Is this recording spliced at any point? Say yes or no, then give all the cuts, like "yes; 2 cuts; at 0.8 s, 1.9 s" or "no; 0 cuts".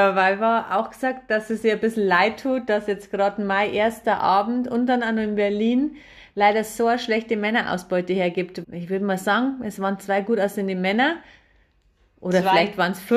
yes; 1 cut; at 8.6 s